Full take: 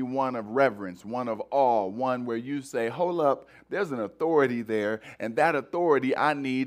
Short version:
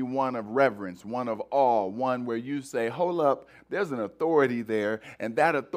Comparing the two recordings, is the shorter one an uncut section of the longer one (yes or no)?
yes